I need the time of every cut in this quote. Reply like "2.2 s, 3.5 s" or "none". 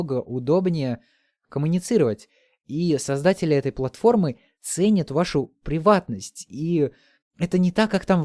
none